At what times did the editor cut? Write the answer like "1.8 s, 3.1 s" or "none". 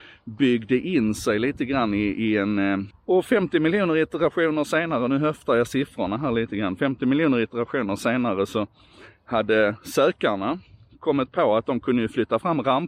2.9 s